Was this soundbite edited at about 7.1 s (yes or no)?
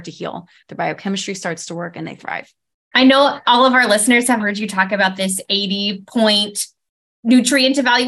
no